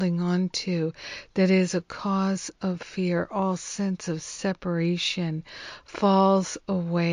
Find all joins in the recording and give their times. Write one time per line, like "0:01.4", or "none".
none